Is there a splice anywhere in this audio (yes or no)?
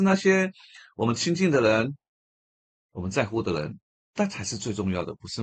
no